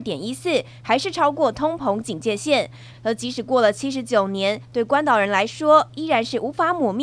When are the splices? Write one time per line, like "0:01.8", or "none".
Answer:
0:02.9